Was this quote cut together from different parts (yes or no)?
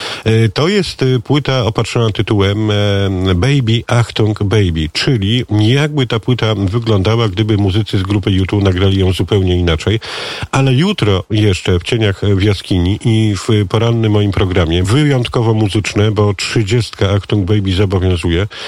yes